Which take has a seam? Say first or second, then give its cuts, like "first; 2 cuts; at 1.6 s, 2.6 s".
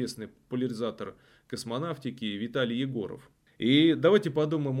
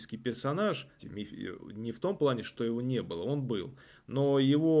second; 1 cut; at 1.0 s